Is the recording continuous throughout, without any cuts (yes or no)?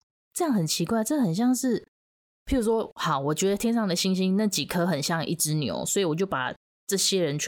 yes